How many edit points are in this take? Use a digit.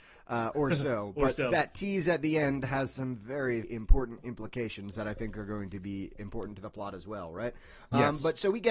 1